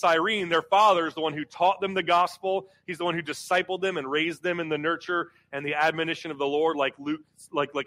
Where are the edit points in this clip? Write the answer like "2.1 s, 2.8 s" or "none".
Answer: none